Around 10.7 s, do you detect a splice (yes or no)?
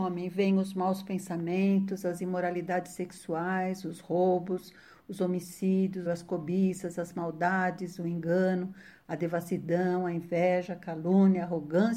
no